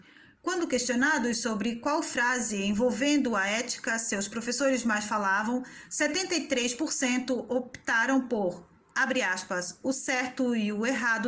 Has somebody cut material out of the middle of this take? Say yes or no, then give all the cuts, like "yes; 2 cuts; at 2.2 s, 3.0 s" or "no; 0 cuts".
no; 0 cuts